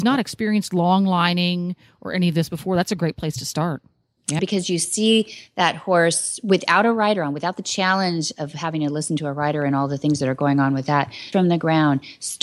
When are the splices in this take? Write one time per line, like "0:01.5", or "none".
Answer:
0:04.4
0:11.3

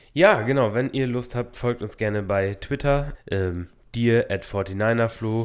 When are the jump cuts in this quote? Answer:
0:03.1

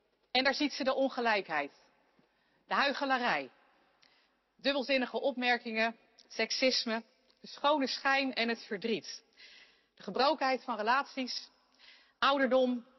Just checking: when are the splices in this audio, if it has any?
none

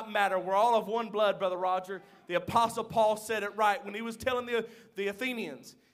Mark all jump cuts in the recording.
none

